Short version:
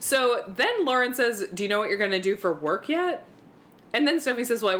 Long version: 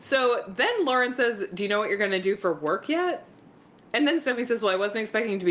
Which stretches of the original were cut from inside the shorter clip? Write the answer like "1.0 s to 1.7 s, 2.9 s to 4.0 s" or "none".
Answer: none

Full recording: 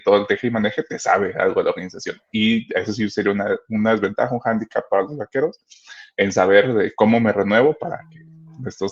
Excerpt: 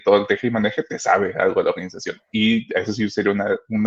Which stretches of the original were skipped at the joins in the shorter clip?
none

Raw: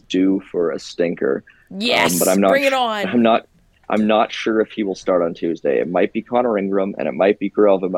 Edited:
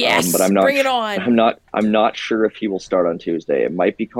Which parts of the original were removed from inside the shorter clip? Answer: 3.5 s to 3.8 s

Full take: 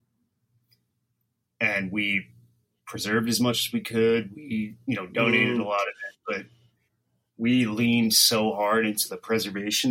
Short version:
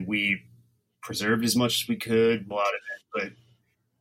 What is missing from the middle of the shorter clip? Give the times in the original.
4.3 s to 5.6 s

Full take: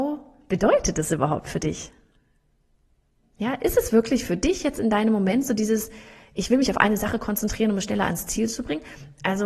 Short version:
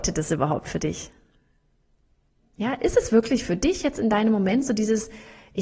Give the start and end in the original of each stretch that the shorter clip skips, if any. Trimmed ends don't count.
none

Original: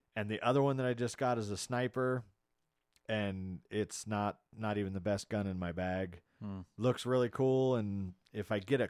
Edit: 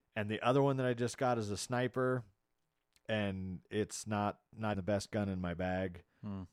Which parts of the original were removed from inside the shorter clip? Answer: 4.7 s to 4.9 s

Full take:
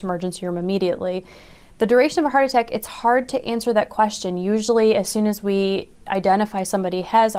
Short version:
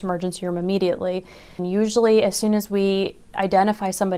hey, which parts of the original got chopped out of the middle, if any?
1.6 s to 4.3 s

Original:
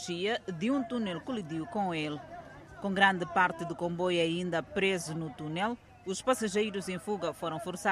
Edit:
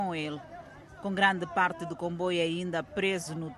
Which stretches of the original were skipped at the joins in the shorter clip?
none

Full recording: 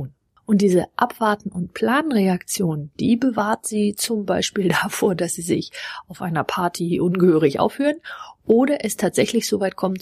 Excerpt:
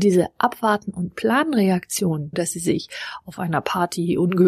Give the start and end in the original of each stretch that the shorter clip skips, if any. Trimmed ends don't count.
2.9 s to 5.2 s

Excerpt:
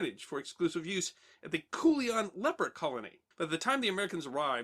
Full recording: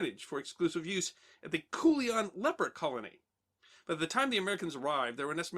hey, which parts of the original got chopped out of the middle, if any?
3.3 s to 3.8 s

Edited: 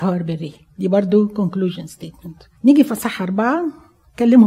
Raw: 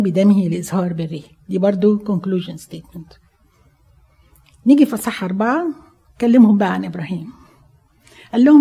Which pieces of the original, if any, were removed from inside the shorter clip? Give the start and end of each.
3.3 s to 4.6 s

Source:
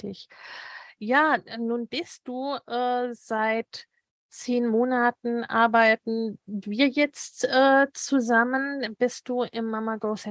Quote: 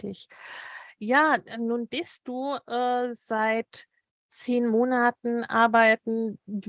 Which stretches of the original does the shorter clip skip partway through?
none

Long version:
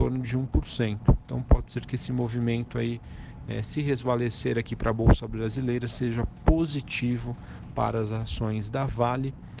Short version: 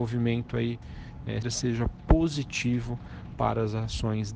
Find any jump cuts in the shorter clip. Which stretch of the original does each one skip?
3.6 s to 5.8 s

